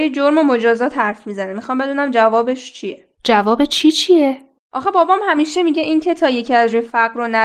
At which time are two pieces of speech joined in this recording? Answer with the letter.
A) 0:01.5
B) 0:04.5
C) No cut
C